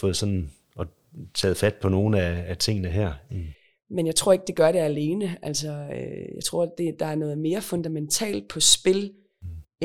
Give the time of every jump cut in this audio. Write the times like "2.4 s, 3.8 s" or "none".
3.3 s